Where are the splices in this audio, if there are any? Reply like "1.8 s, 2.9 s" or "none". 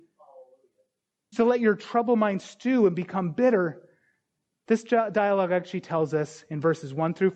1.3 s